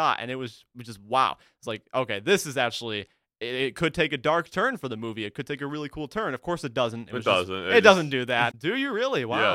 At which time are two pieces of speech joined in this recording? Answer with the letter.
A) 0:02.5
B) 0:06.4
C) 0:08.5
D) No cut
C